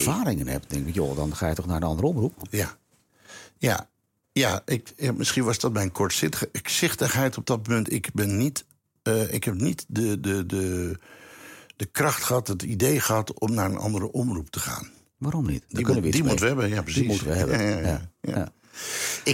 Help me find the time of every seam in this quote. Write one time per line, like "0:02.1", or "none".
0:15.7